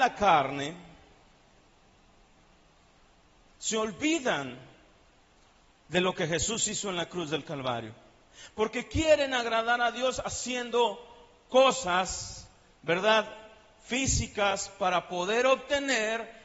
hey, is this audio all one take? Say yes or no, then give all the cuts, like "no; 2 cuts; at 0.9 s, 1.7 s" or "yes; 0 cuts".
yes; 0 cuts